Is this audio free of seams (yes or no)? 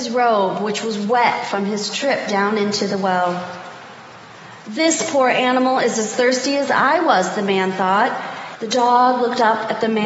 no